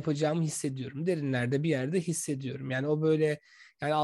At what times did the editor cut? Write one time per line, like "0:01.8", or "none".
none